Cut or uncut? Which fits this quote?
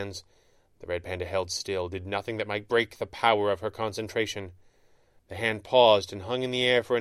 cut